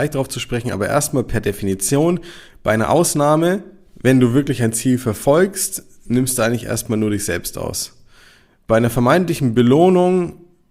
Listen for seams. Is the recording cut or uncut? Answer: uncut